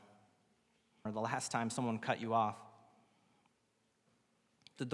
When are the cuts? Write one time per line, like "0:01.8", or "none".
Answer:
0:01.1